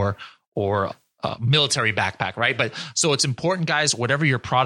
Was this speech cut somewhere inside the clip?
no; 0 cuts

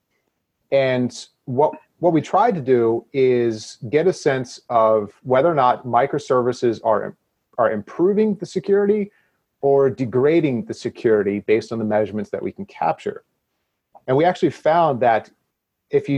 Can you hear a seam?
no; 0 cuts

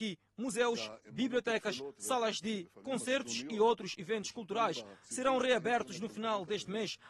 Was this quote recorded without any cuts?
yes; 0 cuts

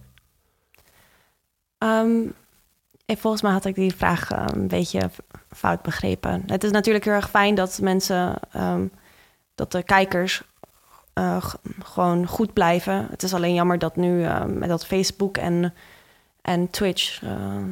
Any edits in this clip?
no; 0 cuts

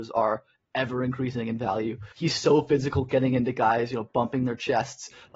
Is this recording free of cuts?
no; 1 cut; at 2.1 s

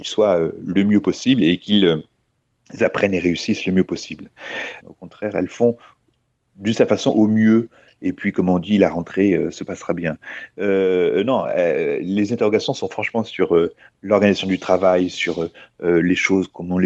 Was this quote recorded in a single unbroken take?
no; 1 cut; at 4.8 s

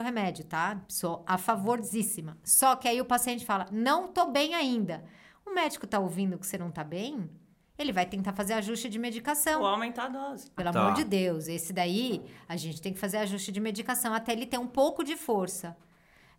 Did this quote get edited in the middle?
yes; 1 cut; at 10.6 s

